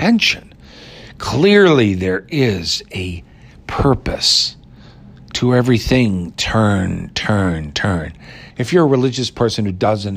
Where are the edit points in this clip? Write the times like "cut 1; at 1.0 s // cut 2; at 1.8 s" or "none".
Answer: cut 1; at 8.5 s